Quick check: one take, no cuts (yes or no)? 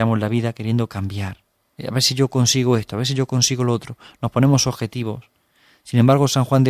no